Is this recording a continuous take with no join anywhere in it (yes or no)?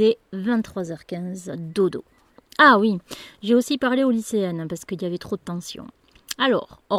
yes